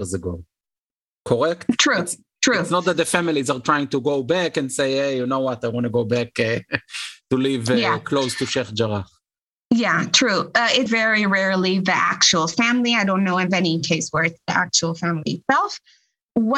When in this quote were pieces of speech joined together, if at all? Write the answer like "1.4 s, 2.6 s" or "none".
10.9 s